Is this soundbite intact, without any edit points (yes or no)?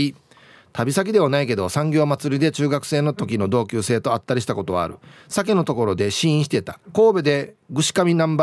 no